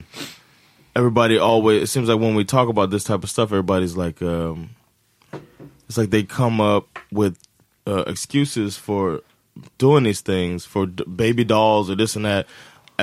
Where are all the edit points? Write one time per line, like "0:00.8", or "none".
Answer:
none